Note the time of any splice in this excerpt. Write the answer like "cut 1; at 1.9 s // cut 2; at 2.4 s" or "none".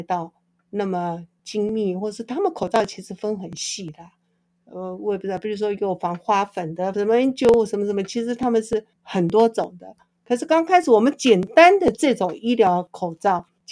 cut 1; at 6.9 s // cut 2; at 8.9 s